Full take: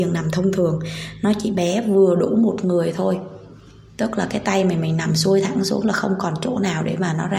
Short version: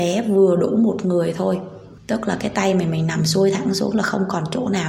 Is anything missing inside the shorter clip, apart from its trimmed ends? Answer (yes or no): yes